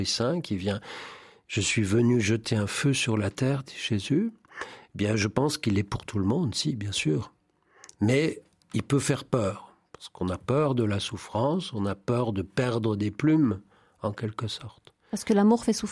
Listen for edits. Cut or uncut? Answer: uncut